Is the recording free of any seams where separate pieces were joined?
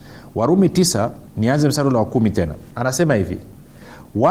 no; 2 cuts; at 1.3 s, 2.7 s

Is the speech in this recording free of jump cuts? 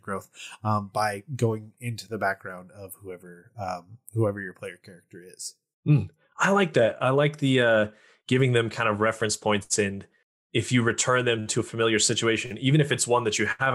yes; 0 cuts

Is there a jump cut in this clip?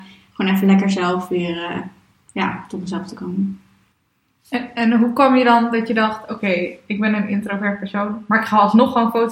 no; 0 cuts

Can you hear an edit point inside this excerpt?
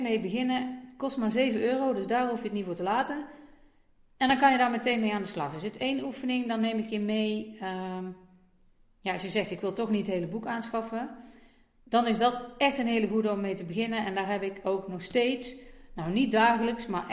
no; 0 cuts

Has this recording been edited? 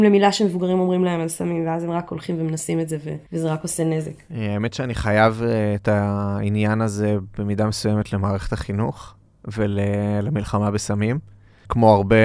no; 0 cuts

